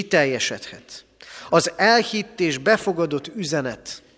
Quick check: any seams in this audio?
no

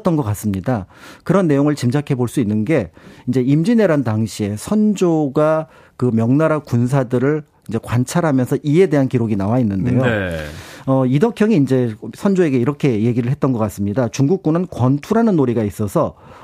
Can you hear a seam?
no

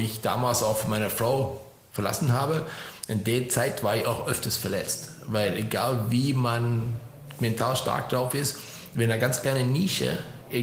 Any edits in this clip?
no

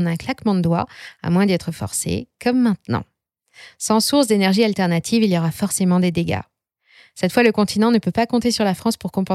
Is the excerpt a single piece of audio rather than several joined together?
yes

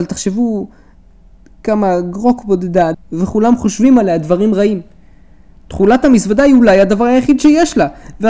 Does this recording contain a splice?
yes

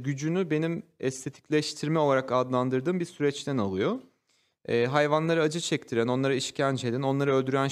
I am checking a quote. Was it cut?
no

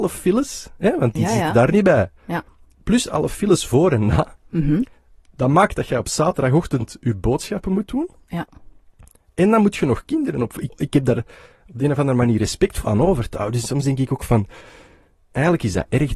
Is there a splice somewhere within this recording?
yes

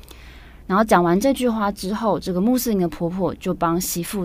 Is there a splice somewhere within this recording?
no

